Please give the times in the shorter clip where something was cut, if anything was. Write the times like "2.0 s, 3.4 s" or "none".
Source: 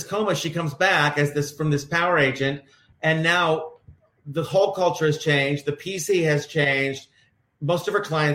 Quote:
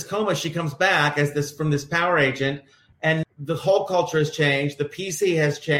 3.2 s